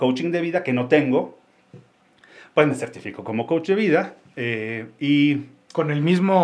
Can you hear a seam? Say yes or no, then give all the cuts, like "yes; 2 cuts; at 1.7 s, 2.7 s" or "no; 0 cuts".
no; 0 cuts